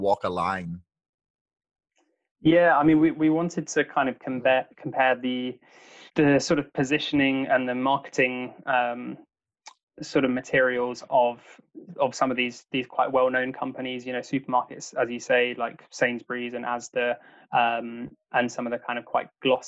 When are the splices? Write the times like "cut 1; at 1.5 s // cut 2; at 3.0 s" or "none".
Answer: cut 1; at 6.1 s